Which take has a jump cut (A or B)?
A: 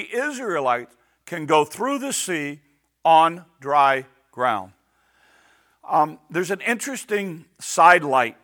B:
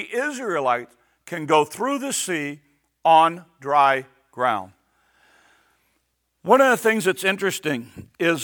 A